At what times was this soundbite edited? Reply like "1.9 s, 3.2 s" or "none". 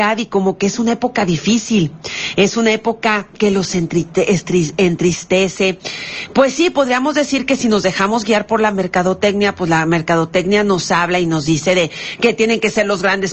none